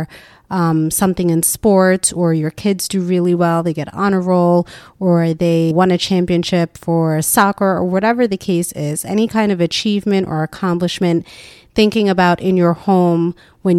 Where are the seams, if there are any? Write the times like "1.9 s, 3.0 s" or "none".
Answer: 5.7 s